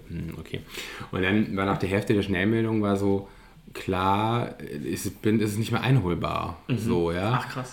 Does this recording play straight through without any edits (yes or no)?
yes